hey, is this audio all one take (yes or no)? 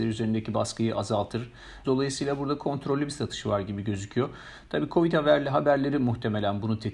no